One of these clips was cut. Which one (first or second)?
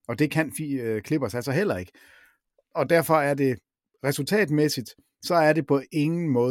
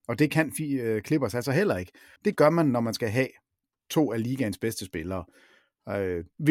second